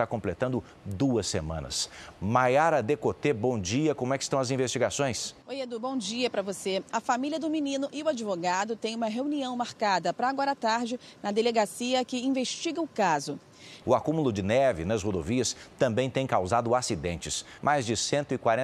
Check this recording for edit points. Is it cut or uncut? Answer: cut